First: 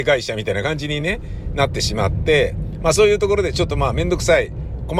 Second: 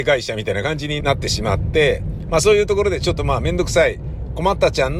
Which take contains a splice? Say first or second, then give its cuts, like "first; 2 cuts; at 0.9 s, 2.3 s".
second; 1 cut; at 1.0 s